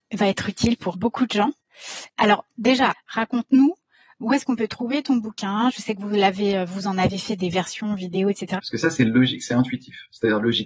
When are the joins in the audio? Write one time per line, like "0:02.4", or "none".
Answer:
0:00.9
0:02.9
0:08.6